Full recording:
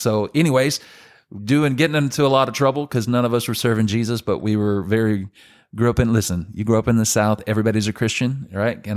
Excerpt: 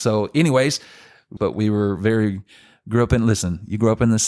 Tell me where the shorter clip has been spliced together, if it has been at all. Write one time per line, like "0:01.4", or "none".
0:01.4